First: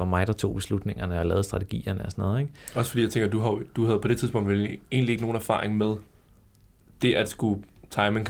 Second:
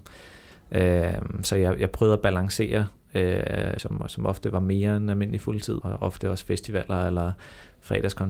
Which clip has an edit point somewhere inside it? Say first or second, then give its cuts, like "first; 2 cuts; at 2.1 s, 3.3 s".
second; 2 cuts; at 3.8 s, 5.8 s